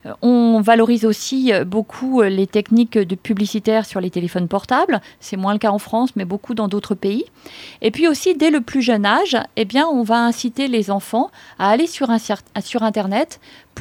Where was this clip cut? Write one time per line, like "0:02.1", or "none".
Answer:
none